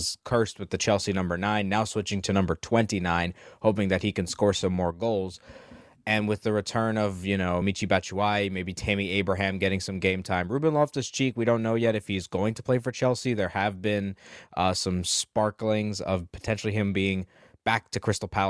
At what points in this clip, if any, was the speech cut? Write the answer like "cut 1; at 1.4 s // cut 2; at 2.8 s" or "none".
none